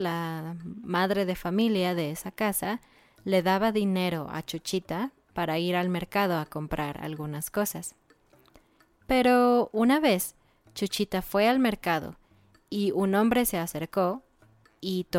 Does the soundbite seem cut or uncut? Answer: uncut